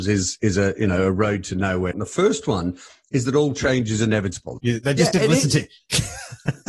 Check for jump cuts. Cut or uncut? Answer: cut